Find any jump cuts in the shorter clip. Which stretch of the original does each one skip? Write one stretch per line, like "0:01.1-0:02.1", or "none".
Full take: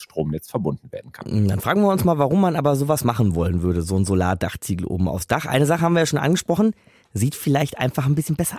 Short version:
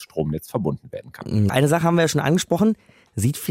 0:01.5-0:05.5